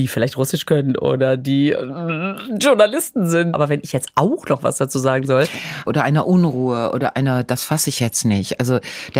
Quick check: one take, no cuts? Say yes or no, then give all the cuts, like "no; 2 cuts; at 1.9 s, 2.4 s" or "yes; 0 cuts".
no; 2 cuts; at 3.5 s, 5.9 s